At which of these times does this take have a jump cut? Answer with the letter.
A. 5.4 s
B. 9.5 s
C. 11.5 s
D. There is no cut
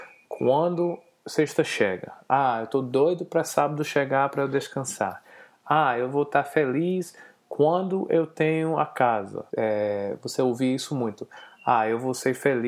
B